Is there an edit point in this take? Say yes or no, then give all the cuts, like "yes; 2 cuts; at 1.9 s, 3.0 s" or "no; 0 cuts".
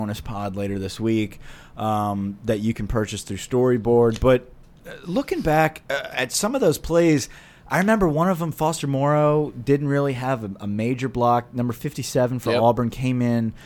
no; 0 cuts